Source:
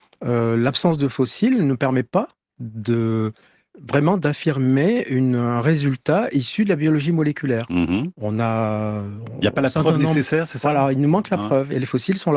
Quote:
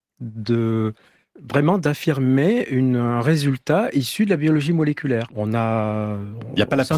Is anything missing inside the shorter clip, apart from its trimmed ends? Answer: yes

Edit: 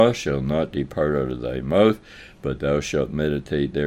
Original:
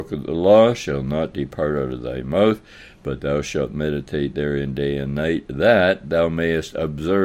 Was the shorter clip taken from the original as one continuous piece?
yes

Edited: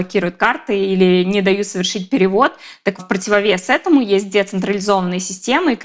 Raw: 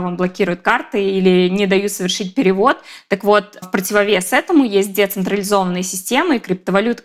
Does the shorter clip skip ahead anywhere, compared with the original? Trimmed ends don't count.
yes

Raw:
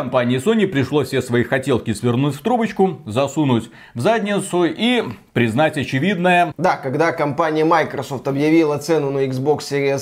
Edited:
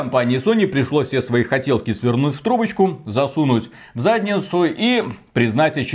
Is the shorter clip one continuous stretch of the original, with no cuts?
yes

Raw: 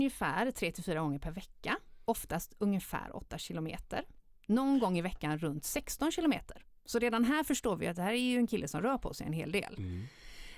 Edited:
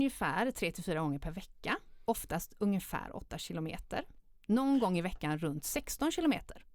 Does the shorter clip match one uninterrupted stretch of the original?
yes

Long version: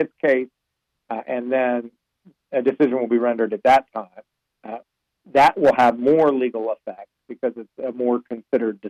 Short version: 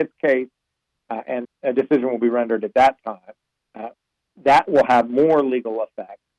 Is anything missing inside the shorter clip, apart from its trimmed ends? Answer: yes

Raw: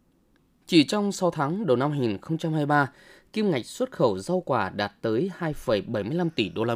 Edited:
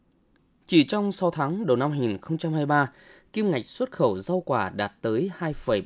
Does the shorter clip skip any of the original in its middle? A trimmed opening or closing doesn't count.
no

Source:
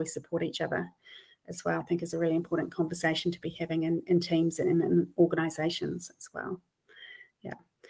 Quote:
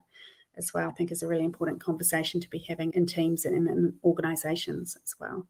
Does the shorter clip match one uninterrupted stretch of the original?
no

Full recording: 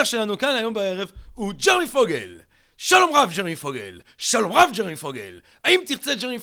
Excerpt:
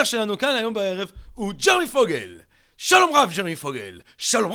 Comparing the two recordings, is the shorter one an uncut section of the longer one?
yes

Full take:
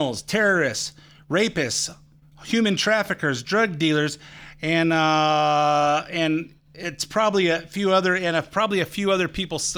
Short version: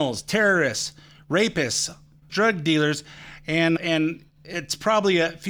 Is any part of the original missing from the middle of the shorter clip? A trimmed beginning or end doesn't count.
yes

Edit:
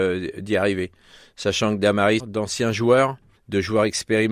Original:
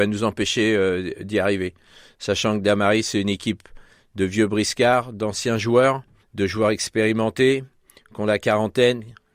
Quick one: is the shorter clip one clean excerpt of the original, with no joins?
no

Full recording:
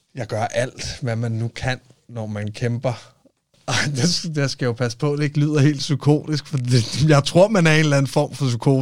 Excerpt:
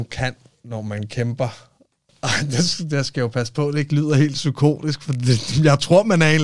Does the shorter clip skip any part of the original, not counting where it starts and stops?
no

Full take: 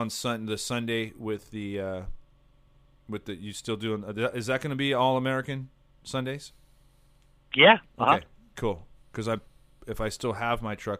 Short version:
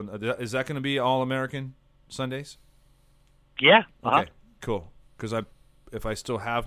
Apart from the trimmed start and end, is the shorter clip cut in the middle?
no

